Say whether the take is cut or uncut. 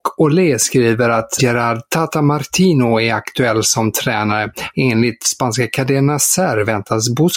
cut